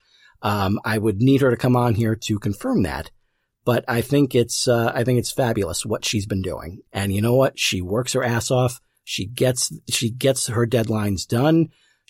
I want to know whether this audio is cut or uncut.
cut